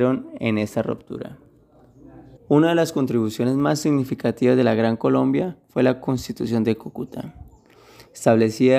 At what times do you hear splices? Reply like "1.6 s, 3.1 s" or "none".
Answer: 2.4 s